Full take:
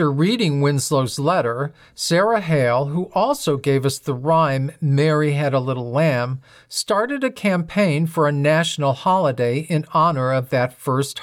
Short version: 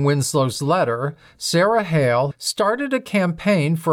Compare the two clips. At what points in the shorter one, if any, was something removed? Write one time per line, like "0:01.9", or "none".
0:02.3